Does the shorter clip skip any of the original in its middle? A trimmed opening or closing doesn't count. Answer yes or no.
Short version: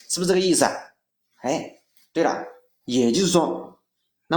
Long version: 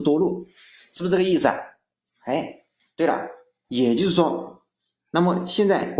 no